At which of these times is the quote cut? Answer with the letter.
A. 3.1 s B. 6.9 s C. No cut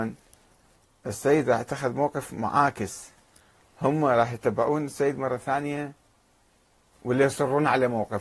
C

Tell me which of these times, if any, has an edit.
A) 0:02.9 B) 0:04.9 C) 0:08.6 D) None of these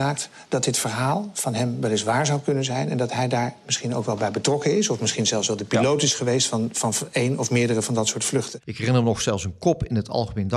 C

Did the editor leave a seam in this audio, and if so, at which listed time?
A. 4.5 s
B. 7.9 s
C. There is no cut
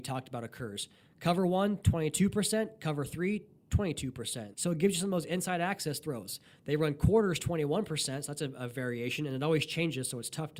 A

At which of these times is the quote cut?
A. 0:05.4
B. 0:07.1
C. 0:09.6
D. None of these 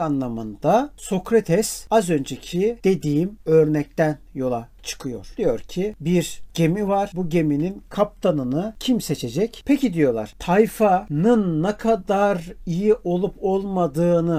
C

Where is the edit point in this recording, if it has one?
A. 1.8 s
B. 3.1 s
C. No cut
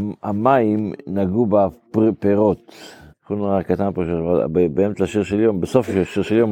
B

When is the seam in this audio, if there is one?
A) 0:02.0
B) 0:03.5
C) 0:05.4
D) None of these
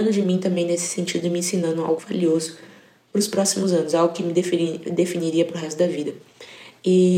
A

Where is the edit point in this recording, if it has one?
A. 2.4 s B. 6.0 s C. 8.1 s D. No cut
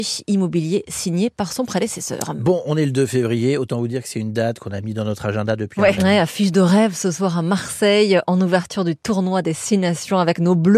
B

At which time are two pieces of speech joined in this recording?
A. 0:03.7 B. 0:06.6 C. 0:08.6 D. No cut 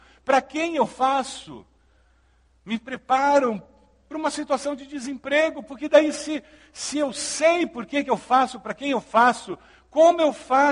D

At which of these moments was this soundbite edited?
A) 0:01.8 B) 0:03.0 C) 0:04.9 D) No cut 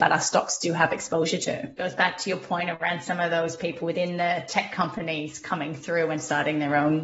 A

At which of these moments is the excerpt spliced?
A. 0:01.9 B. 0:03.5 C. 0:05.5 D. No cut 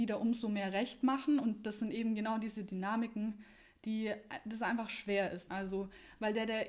C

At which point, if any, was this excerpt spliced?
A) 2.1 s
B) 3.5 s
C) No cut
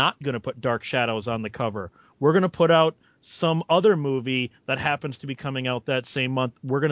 C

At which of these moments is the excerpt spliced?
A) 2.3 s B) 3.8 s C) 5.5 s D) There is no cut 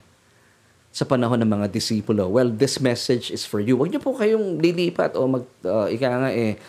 D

